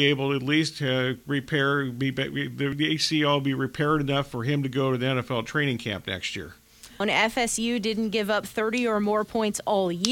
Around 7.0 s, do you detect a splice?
yes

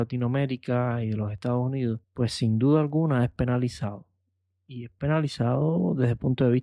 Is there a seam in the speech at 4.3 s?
no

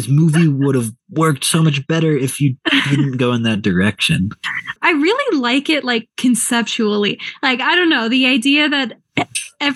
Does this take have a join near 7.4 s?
no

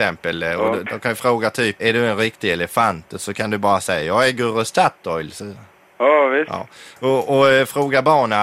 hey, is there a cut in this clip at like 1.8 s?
yes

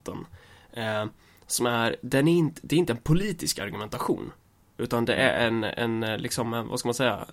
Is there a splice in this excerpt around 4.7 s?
no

